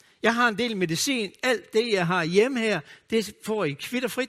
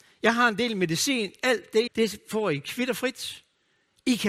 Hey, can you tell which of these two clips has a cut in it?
second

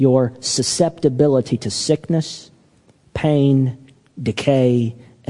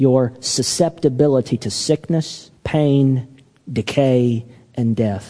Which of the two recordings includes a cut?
second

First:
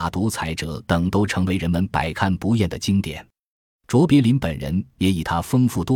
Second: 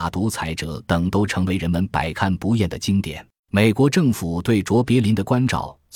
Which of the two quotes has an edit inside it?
second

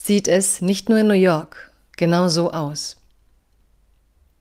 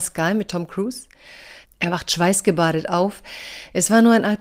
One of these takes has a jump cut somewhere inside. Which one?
second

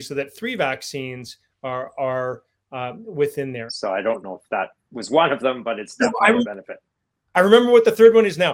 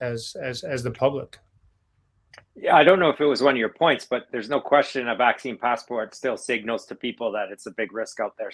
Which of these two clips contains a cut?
first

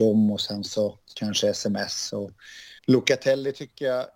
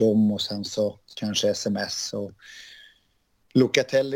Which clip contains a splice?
first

